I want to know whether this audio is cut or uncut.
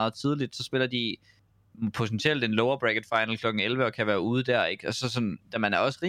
uncut